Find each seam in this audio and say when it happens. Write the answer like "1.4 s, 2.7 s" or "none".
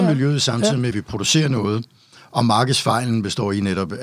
none